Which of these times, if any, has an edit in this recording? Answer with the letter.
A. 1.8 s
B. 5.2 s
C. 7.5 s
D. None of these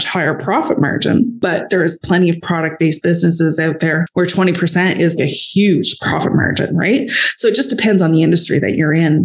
B